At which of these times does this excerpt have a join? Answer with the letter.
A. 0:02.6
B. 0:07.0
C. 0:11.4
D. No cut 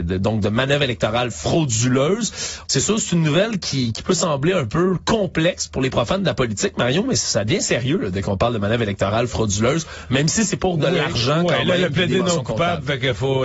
A